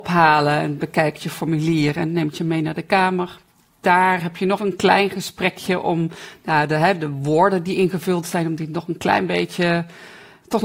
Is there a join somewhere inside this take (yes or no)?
yes